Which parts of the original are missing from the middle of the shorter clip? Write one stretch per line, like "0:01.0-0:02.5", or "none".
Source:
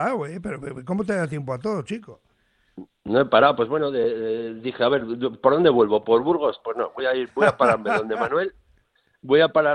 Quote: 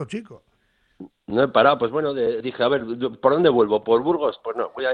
0:04.2-0:04.6